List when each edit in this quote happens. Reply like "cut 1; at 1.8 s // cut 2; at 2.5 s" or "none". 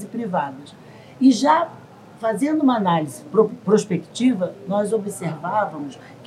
none